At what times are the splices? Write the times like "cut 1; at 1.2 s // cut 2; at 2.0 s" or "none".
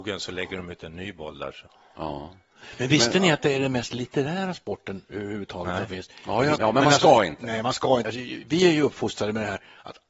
cut 1; at 6.6 s // cut 2; at 8.0 s

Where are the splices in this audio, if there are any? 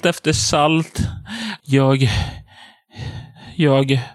cut 1; at 1.6 s

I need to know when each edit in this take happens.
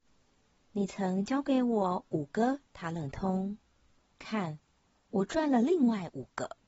none

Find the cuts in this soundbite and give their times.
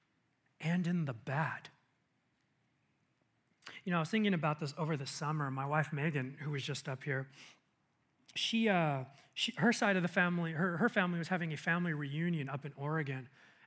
none

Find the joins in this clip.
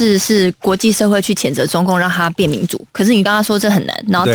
cut 1; at 3.3 s

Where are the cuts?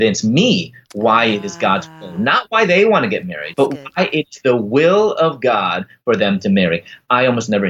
cut 1; at 3.5 s

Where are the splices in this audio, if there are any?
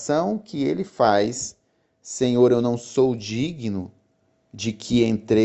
none

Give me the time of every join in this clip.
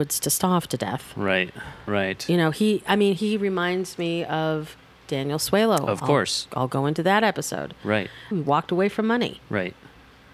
cut 1; at 1.9 s // cut 2; at 8.3 s

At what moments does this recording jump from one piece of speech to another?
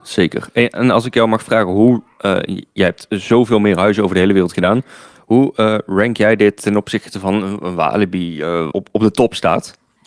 cut 1; at 8.7 s

